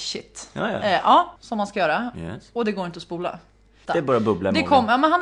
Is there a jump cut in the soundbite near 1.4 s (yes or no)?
yes